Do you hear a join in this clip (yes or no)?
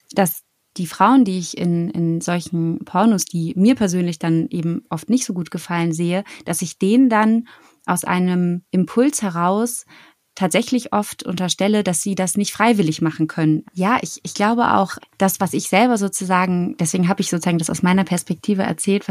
yes